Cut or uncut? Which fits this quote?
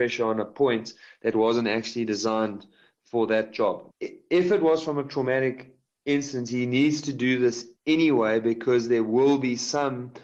cut